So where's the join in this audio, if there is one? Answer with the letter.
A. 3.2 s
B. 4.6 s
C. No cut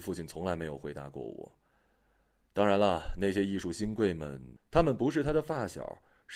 B